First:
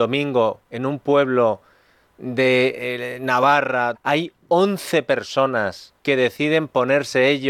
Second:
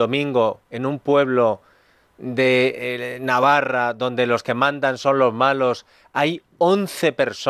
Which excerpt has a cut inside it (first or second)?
first